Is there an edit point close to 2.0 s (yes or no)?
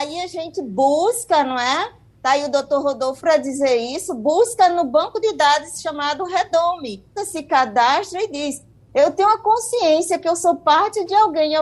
no